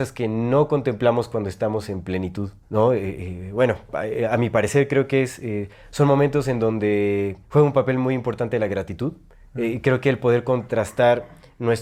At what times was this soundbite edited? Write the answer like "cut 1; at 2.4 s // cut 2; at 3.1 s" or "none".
cut 1; at 2.6 s // cut 2; at 7.4 s